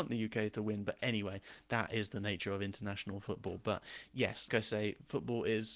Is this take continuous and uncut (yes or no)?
no